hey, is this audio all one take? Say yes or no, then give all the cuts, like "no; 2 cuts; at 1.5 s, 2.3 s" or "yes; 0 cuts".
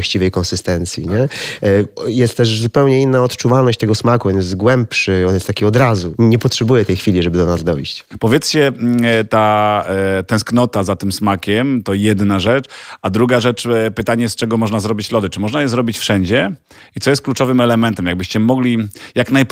yes; 0 cuts